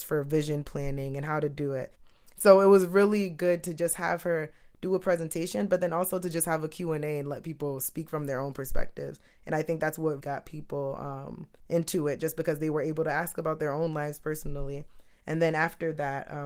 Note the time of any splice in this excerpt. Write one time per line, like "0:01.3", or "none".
0:01.9
0:10.2